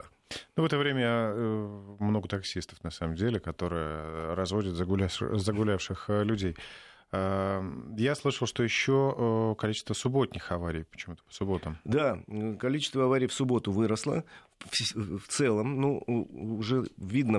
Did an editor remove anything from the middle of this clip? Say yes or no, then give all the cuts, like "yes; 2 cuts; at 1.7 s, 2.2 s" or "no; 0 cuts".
no; 0 cuts